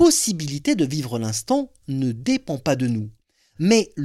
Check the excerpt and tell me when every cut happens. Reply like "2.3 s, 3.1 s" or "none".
none